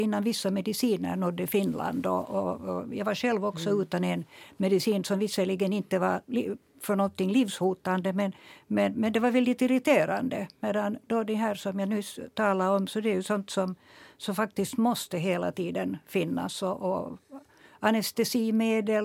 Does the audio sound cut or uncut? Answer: uncut